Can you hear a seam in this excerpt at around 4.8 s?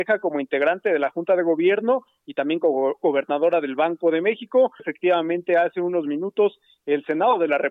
yes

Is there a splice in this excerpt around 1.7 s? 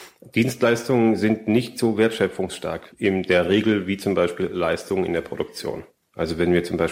no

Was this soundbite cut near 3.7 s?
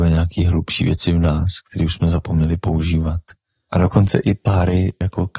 yes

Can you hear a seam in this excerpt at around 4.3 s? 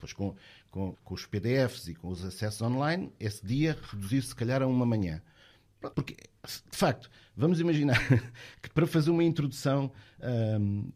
no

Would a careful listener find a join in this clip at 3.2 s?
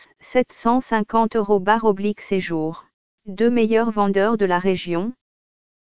yes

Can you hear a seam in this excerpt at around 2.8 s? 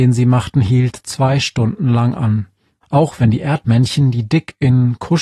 yes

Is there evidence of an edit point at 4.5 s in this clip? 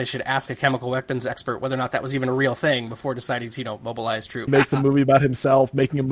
yes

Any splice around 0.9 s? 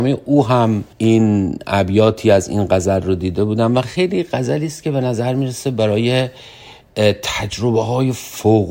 yes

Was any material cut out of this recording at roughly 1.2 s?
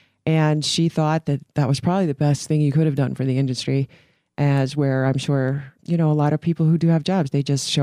no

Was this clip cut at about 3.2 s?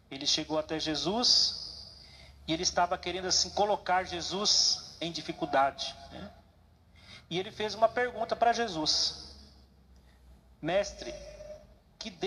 no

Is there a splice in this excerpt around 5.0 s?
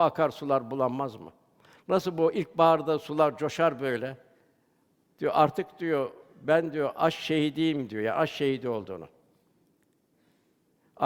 yes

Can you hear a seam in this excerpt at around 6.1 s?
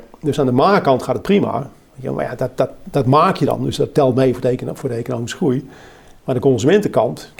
no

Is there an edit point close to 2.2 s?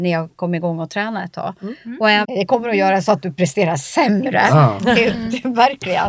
yes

